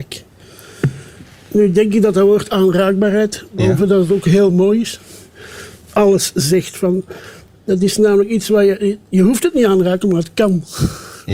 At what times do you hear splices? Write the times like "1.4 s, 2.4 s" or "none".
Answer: none